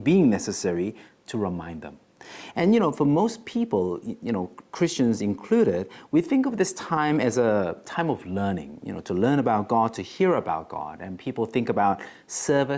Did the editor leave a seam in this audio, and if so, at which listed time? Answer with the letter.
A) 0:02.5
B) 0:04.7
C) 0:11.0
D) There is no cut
A